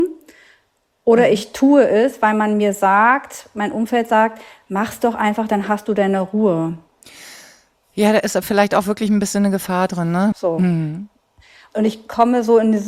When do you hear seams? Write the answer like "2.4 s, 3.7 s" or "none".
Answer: 10.3 s